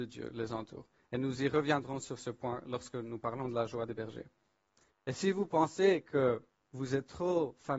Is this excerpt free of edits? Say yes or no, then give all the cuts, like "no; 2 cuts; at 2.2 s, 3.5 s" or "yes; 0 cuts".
no; 1 cut; at 4.9 s